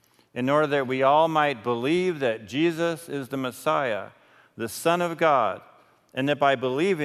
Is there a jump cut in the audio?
no; 0 cuts

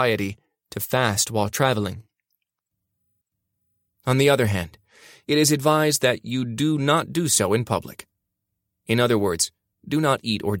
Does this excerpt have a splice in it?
yes; 1 cut; at 5.2 s

